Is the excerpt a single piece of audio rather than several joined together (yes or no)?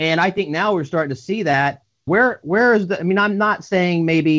no